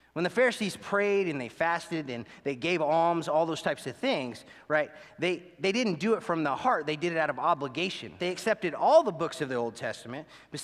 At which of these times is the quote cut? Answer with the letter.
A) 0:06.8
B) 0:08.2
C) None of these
B